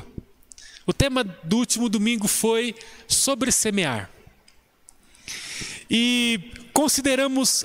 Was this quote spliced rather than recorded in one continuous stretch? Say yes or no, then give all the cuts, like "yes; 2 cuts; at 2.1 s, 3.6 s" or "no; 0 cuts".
no; 0 cuts